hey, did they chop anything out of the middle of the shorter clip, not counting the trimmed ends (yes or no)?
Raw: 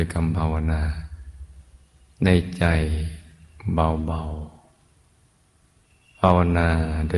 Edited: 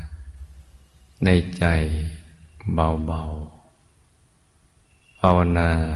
no